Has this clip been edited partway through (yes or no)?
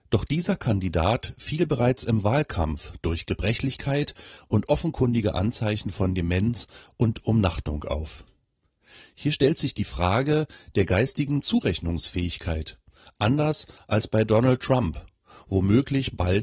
no